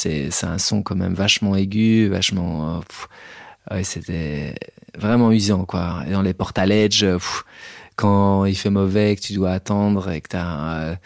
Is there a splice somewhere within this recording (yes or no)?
no